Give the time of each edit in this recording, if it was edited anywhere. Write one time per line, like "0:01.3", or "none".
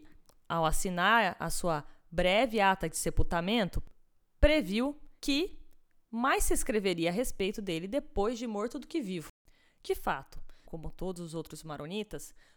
0:05.2
0:10.6